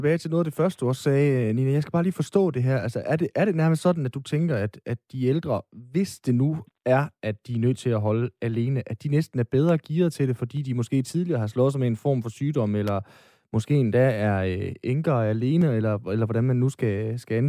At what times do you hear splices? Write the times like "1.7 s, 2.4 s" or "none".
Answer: none